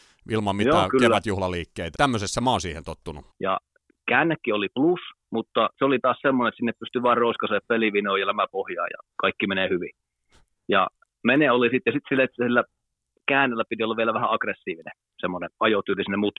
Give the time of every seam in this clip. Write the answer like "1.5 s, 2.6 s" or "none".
1.9 s, 3.3 s